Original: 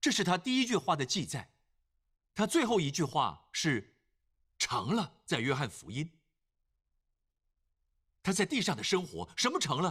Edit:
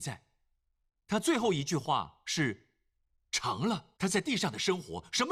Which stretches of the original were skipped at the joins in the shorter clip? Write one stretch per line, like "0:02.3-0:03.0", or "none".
0:05.2-0:08.2